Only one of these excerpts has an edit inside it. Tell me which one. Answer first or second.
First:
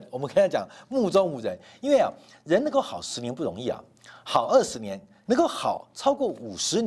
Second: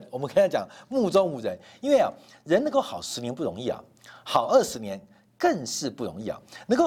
first